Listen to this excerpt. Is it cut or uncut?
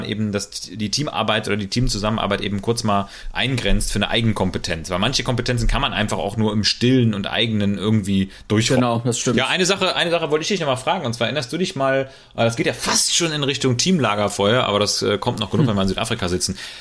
uncut